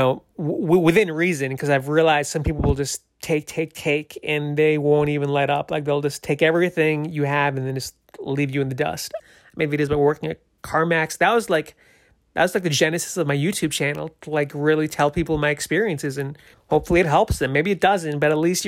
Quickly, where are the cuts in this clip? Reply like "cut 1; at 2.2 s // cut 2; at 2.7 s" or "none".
cut 1; at 9.2 s // cut 2; at 16.5 s